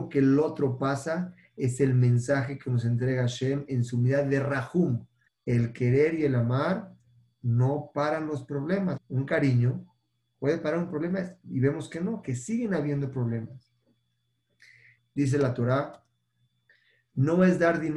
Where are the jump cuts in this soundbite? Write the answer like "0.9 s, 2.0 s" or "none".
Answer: 5.3 s, 9.0 s, 15.0 s